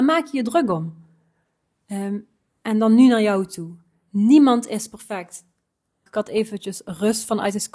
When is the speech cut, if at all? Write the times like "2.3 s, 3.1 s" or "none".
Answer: 6.1 s